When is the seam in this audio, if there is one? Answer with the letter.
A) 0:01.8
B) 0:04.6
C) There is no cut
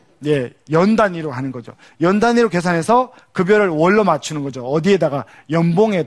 C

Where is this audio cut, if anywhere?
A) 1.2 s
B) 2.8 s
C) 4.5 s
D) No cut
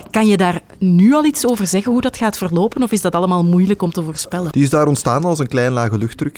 C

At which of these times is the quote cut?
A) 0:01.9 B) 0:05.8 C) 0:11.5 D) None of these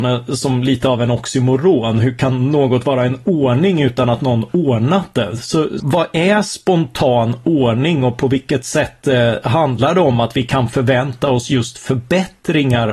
B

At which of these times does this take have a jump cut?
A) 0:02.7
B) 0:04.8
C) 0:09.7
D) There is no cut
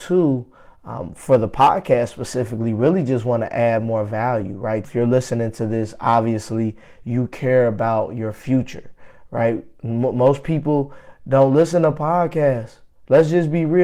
B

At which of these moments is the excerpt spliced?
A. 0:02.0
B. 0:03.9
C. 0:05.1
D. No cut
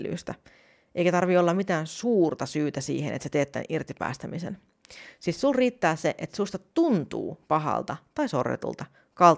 D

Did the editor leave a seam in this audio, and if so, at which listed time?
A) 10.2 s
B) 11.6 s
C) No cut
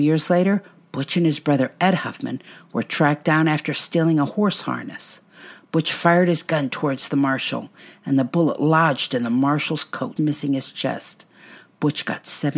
A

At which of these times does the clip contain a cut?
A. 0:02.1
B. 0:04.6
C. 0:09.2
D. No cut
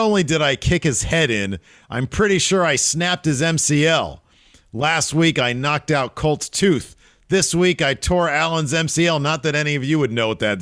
D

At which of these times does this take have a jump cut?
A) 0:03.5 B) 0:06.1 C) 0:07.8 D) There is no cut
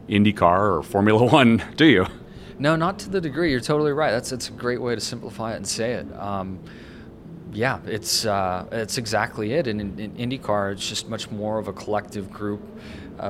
D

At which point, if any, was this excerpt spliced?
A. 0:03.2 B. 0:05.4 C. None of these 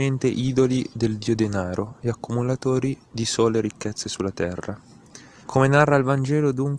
B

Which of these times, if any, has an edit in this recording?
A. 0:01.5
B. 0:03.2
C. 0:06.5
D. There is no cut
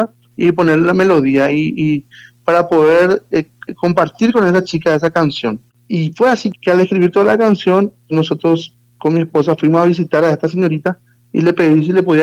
C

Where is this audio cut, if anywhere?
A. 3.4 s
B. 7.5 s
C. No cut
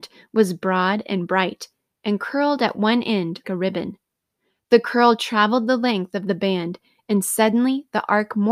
A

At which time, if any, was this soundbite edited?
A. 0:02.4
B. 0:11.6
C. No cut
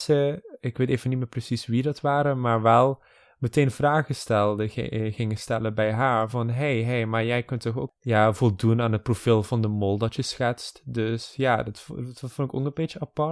C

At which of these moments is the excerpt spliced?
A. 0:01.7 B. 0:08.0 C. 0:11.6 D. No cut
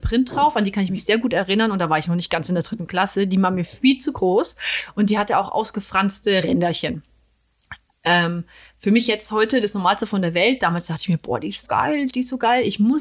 C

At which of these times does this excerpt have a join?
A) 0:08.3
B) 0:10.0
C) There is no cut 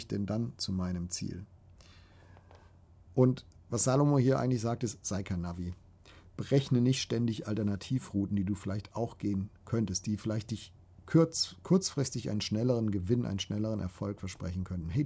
C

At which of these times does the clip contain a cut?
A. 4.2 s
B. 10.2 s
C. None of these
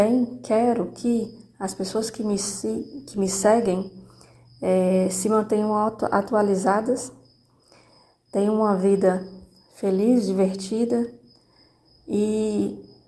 C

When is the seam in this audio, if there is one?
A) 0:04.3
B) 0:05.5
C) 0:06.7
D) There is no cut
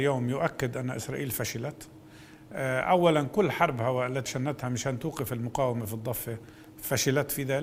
A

